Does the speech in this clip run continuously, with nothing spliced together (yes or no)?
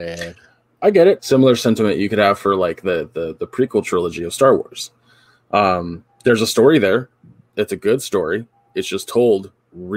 no